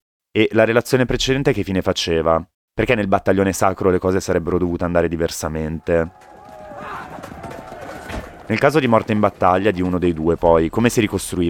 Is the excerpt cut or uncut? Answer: uncut